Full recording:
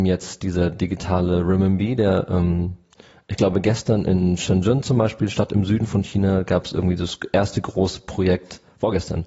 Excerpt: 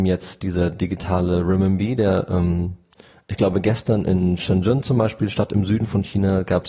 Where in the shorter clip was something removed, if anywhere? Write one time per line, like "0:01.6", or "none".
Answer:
none